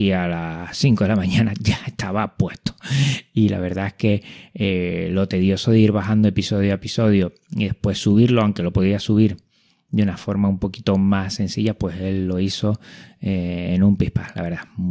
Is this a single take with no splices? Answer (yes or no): yes